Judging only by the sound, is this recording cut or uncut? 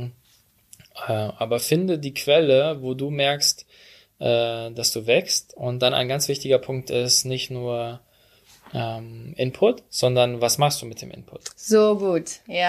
uncut